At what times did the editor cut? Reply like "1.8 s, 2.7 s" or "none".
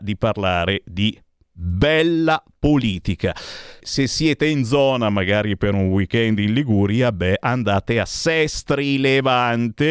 3.8 s